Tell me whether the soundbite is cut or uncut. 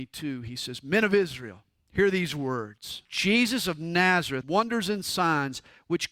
cut